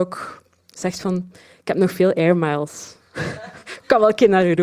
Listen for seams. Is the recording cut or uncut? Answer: uncut